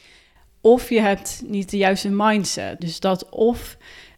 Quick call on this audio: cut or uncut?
cut